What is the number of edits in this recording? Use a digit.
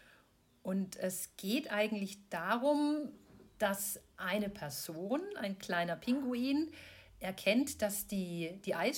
0